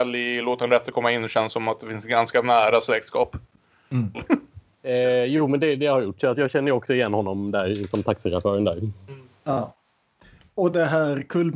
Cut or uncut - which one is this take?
cut